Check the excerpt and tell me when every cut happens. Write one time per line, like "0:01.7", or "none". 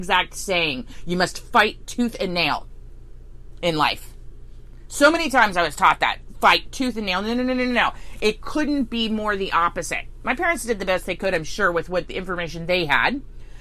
none